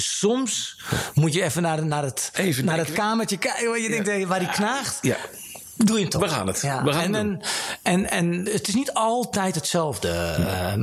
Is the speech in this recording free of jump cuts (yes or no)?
no